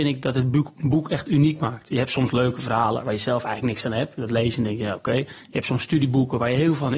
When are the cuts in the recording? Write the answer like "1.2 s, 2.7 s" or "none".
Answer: none